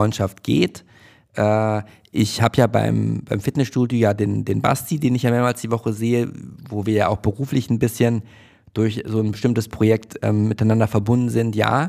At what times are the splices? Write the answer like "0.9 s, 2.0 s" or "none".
none